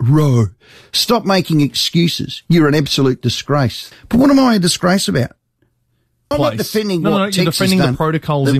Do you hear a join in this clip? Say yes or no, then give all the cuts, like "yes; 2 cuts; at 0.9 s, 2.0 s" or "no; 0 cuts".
yes; 2 cuts; at 3.9 s, 6.3 s